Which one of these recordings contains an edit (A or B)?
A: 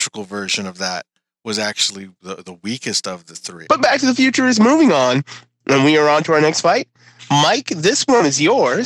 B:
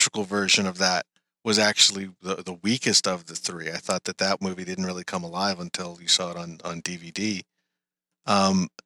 A